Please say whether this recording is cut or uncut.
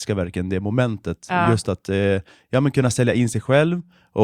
uncut